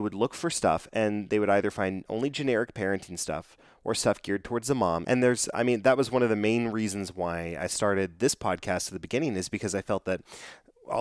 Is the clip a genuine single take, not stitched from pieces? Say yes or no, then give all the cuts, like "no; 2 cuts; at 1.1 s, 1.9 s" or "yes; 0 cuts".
no; 1 cut; at 5.0 s